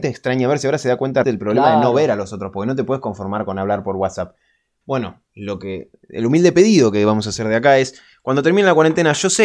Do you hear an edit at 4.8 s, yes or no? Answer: yes